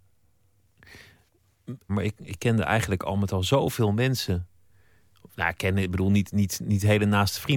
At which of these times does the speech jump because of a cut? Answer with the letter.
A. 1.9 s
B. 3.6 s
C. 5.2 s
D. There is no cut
A